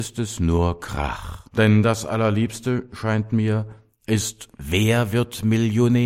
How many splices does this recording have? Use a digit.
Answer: 1